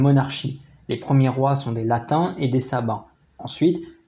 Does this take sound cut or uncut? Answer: uncut